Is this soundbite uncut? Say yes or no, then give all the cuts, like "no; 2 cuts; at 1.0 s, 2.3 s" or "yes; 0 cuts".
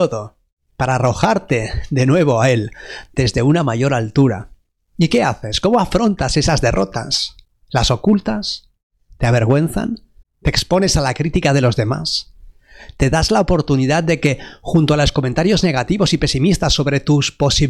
no; 1 cut; at 10.2 s